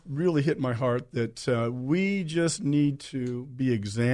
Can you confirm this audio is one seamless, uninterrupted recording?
yes; 0 cuts

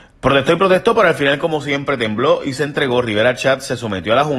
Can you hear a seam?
no; 0 cuts

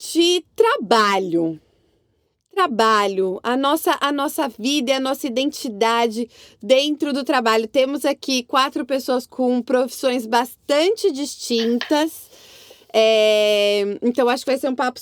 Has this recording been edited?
no; 0 cuts

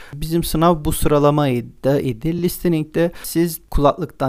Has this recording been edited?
no; 0 cuts

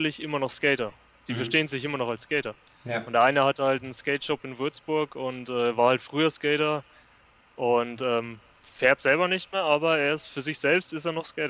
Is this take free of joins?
yes; 0 cuts

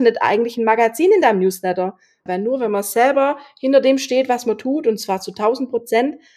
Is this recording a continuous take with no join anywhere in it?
no; 1 cut; at 2.3 s

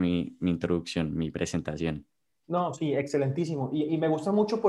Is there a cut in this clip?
no; 0 cuts

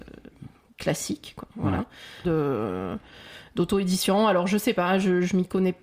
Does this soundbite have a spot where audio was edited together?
yes; 1 cut; at 2.2 s

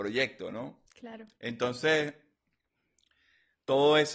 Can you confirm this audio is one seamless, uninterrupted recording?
yes; 0 cuts

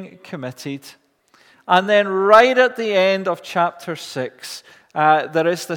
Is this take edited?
no; 0 cuts

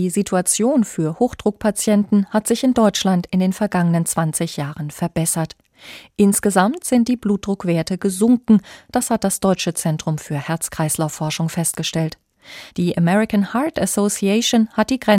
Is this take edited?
yes; 1 cut; at 12.7 s

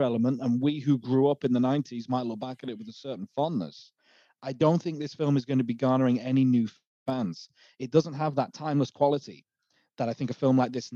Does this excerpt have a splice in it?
no; 0 cuts

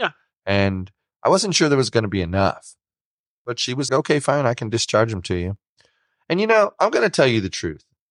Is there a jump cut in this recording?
yes; 1 cut; at 3.9 s

